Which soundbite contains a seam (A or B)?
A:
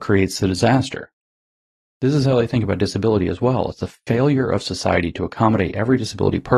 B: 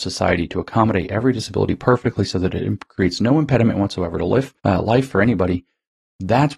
B